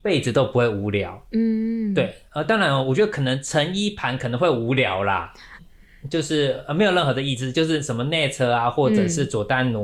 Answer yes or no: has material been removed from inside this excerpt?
yes